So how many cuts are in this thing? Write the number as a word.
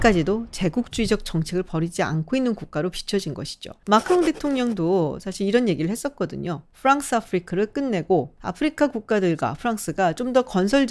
one